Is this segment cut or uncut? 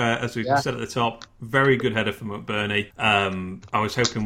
cut